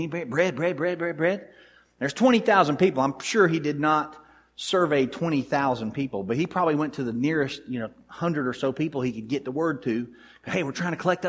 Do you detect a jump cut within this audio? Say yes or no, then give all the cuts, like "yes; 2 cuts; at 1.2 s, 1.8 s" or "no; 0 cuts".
no; 0 cuts